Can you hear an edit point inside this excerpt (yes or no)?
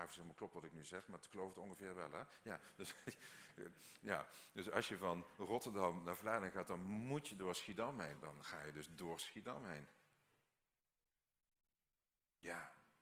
yes